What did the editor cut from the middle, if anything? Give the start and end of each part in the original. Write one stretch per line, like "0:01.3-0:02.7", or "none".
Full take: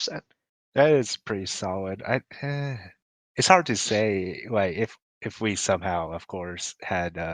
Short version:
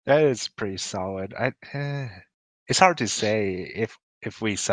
0:04.4-0:04.7